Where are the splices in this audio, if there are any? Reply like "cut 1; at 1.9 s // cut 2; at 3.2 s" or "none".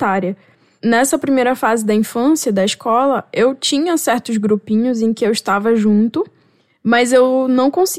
none